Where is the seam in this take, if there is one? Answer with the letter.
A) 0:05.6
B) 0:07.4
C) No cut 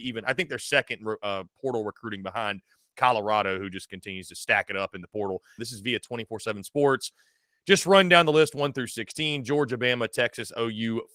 A